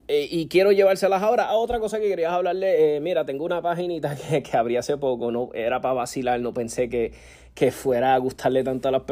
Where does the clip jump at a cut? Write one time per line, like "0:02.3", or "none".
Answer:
none